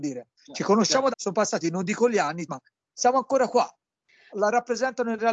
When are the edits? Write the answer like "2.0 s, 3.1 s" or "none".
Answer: 1.1 s, 2.5 s, 4.3 s